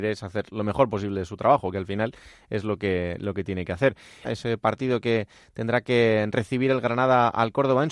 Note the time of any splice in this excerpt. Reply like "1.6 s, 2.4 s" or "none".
4.2 s